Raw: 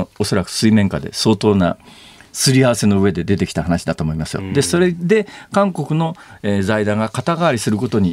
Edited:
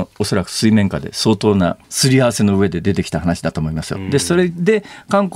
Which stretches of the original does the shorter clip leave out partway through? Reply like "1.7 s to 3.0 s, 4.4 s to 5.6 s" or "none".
1.8 s to 2.3 s